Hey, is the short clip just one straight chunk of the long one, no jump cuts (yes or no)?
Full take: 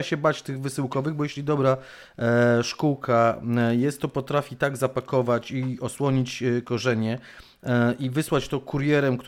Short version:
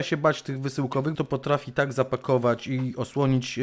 no